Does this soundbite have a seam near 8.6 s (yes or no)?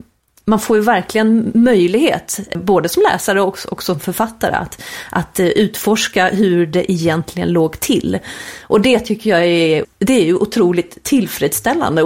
no